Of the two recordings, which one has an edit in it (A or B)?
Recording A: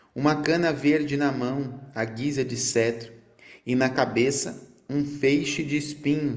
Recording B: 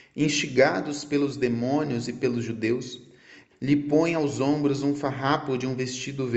B